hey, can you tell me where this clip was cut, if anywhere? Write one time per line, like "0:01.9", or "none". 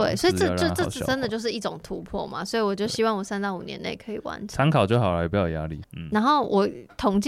0:05.8

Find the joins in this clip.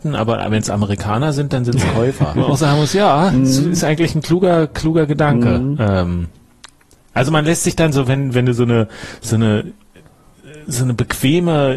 0:02.3

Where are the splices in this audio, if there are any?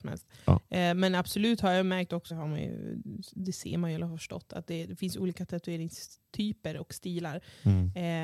0:02.3

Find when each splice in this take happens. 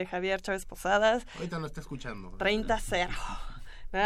none

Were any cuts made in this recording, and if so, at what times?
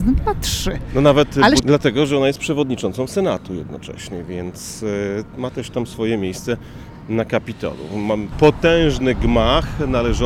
0:01.6
0:08.3

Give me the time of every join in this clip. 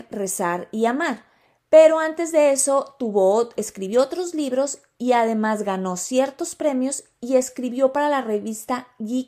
none

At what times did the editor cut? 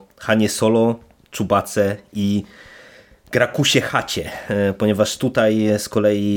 none

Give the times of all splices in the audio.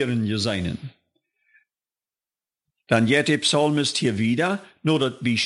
none

